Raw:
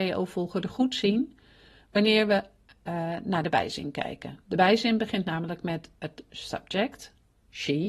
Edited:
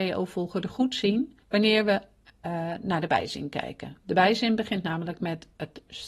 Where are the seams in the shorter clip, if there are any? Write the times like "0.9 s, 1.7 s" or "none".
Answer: 1.4 s